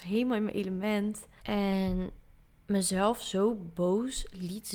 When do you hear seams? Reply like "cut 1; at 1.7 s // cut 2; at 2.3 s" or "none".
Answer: cut 1; at 1.4 s